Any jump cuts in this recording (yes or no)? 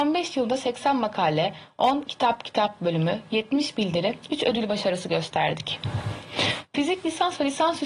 no